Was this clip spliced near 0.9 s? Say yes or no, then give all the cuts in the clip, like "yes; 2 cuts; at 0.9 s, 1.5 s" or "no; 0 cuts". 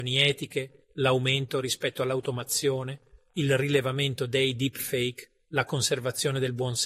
no; 1 cut; at 3.3 s